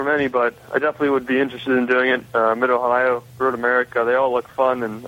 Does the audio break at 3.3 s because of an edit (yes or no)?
yes